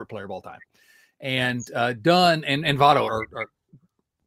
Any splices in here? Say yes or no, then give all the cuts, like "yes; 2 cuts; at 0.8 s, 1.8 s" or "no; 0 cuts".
yes; 1 cut; at 3.1 s